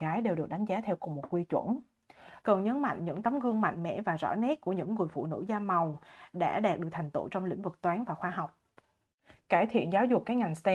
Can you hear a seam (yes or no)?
yes